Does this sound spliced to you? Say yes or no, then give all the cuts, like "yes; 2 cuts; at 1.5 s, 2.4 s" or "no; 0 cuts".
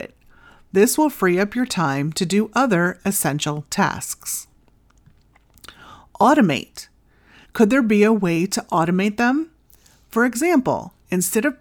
yes; 1 cut; at 7.4 s